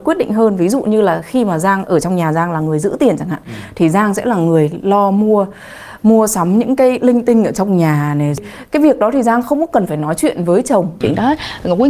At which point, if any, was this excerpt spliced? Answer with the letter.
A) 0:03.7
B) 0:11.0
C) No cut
B